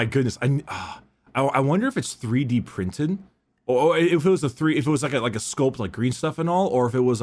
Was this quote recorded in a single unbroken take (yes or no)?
yes